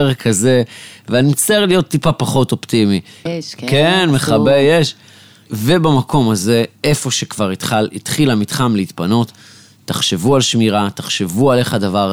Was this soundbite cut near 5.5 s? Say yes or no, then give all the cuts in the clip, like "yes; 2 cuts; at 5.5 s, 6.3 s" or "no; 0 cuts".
yes; 2 cuts; at 3.3 s, 5.5 s